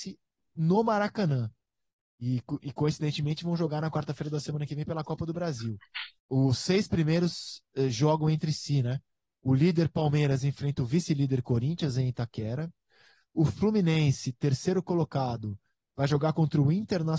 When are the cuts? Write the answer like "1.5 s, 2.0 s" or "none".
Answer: 6.2 s